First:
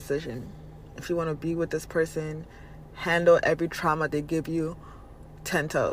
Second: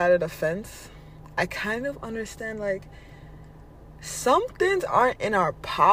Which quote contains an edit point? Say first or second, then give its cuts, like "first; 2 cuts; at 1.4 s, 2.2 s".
first; 1 cut; at 2.9 s